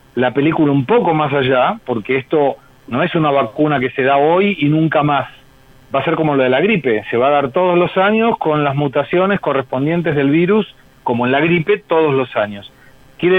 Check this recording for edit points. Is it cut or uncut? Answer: uncut